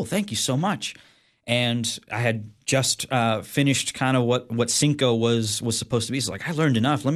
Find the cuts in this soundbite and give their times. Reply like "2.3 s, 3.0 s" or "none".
none